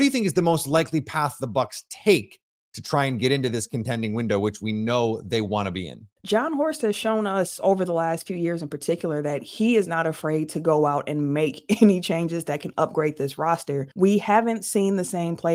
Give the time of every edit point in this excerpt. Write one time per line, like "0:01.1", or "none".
0:06.2
0:13.9